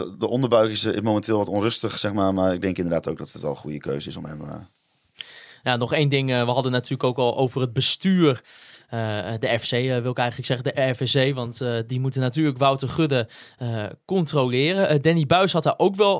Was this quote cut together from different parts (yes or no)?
no